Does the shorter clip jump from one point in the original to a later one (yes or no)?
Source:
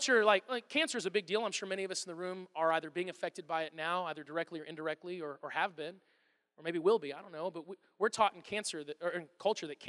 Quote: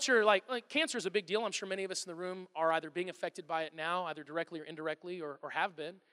no